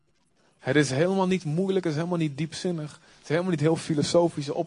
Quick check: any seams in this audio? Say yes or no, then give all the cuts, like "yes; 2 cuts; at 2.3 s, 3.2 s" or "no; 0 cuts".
no; 0 cuts